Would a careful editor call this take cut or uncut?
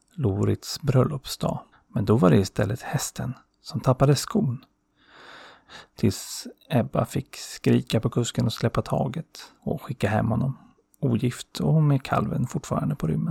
cut